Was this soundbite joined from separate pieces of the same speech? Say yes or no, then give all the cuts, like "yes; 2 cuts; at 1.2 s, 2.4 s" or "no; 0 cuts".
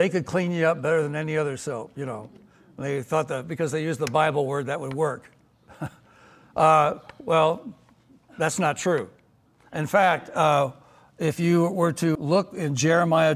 yes; 1 cut; at 12.2 s